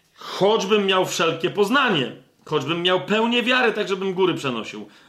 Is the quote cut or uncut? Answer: uncut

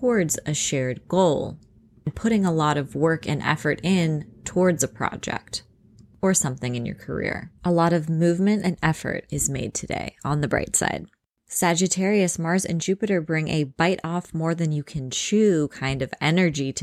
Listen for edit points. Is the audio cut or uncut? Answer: cut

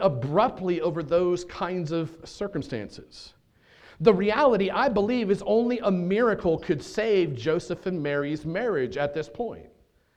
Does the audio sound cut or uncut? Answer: uncut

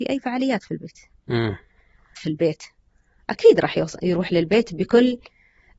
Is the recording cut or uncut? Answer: cut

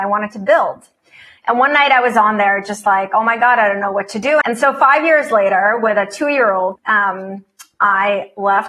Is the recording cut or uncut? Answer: cut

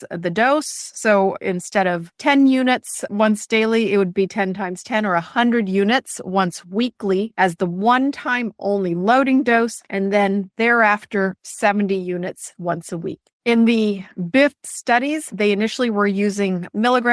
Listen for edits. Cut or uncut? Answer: uncut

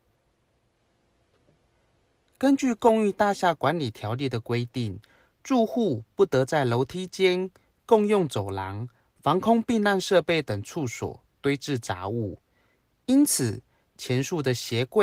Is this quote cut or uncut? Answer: uncut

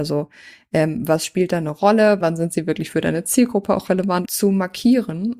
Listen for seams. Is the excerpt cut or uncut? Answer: cut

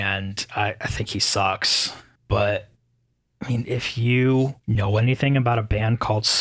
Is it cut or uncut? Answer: cut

